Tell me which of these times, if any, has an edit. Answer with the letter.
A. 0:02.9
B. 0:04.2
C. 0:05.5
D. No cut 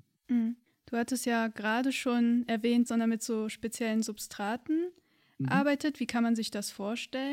A